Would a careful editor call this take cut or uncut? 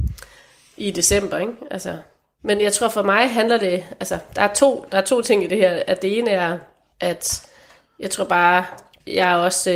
uncut